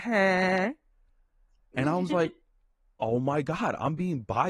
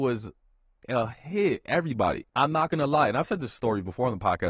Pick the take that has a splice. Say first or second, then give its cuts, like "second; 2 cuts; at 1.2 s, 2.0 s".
second; 1 cut; at 2.3 s